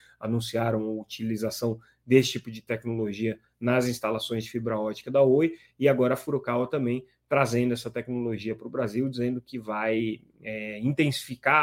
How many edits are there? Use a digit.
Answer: 0